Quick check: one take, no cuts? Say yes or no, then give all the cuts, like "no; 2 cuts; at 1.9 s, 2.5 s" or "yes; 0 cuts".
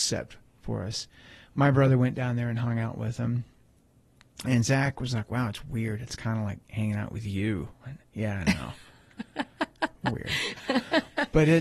yes; 0 cuts